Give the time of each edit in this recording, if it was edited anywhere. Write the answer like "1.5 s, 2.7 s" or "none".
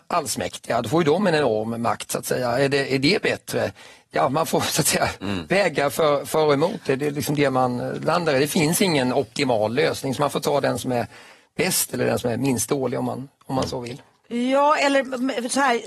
none

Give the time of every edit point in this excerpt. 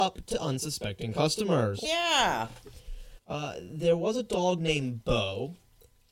1.8 s, 3.2 s

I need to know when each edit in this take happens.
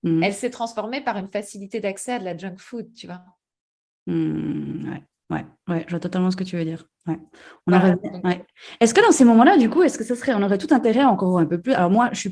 none

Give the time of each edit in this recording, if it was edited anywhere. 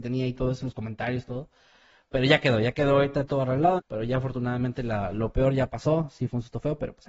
3.8 s

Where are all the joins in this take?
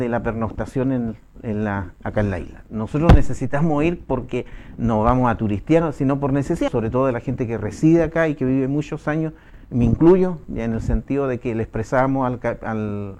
2.7 s, 6.7 s

